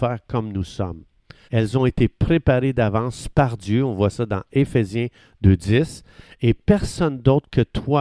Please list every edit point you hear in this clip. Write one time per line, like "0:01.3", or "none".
0:01.4

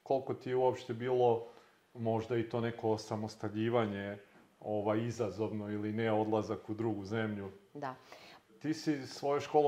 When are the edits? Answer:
0:08.5

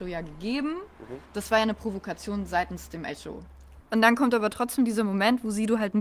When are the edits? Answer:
0:01.3
0:03.8

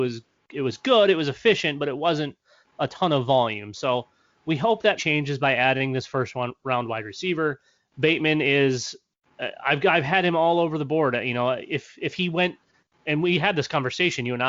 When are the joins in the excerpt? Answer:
0:05.0

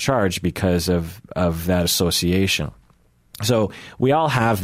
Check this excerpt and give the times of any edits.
none

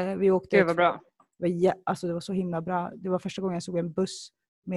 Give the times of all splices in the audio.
none

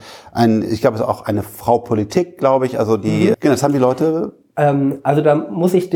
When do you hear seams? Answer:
0:03.3

